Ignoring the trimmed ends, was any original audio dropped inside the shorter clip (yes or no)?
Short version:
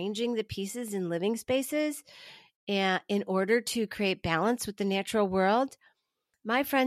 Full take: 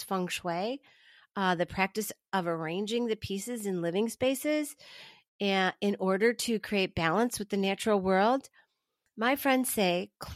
no